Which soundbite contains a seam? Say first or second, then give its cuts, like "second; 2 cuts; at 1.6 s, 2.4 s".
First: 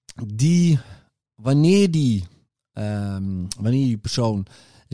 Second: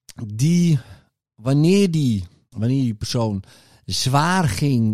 second; 1 cut; at 2.5 s